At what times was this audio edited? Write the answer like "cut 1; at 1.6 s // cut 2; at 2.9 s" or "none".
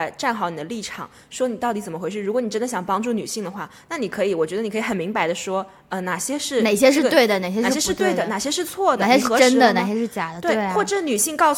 none